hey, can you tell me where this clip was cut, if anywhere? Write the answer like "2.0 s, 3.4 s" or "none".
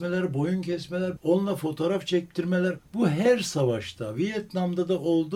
none